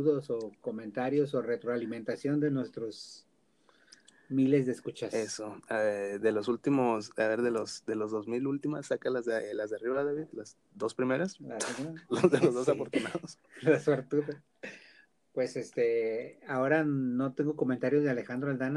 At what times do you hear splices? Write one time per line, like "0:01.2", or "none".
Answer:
0:10.3
0:12.1